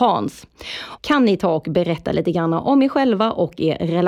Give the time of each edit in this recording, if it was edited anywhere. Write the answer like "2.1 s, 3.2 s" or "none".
1.0 s